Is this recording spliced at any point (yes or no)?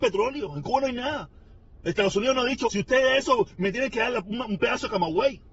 yes